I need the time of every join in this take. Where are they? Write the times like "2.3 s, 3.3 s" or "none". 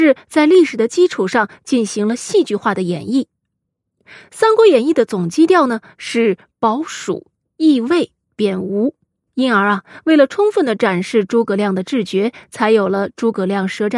none